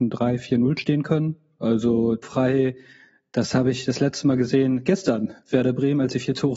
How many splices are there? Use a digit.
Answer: 1